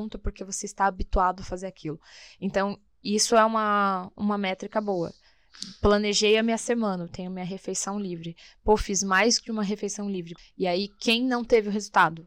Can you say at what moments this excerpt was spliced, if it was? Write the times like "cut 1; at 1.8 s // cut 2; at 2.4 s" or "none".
cut 1; at 10.4 s